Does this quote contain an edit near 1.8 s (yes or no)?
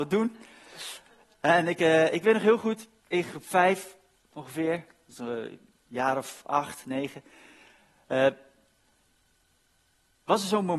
no